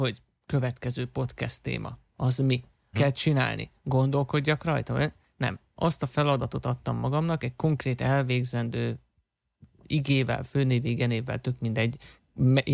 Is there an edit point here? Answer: yes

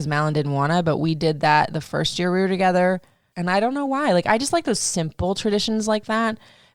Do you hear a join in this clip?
yes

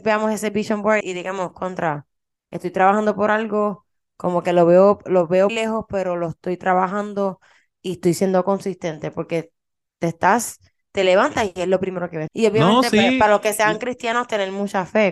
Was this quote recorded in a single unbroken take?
no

